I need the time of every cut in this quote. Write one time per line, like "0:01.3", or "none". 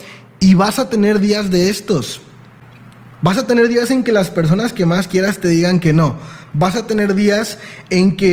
none